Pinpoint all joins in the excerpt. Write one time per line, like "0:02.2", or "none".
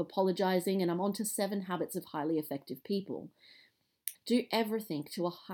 0:04.1

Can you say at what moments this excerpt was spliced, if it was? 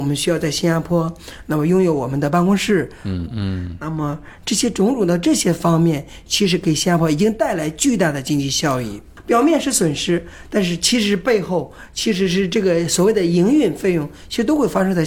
0:03.3

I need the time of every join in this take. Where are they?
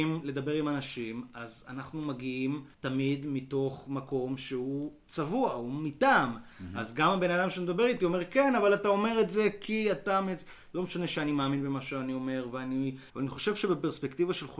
0:02.7
0:13.1

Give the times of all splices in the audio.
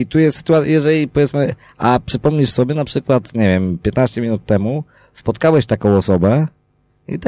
none

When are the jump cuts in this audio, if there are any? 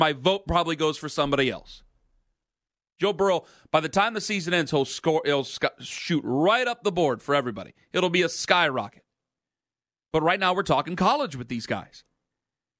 0:03.0

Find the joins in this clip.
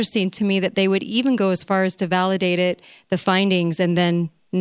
none

